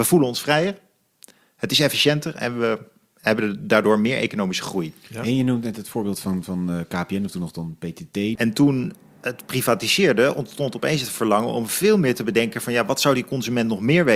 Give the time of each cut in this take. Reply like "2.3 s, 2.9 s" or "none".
8.4 s